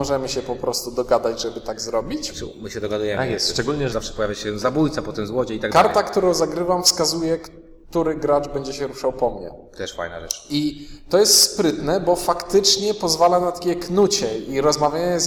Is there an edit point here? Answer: yes; 1 cut; at 3.9 s

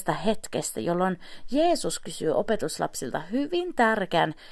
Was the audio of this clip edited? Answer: no; 0 cuts

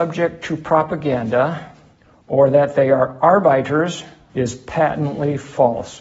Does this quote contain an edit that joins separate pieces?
yes; 1 cut; at 4.3 s

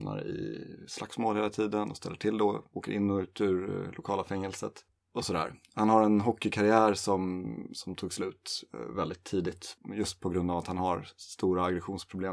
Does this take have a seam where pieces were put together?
no; 0 cuts

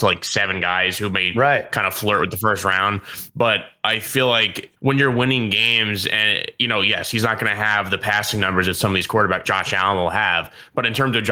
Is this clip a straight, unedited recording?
no; 2 cuts; at 4.8 s, 9.4 s

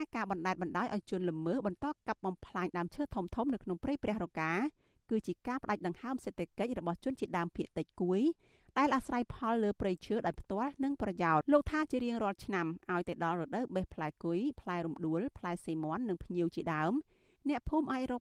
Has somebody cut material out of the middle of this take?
yes; 1 cut; at 11.4 s

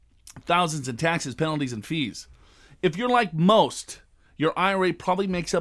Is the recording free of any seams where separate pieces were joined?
yes; 0 cuts

